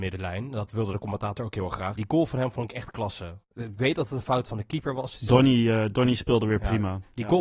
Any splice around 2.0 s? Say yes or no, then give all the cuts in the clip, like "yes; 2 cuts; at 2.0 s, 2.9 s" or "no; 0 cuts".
yes; 1 cut; at 2.0 s